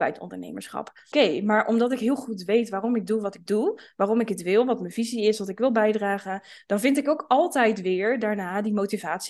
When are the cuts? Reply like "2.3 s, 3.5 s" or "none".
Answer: 1.1 s